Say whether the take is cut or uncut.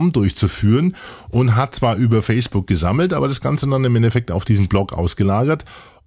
uncut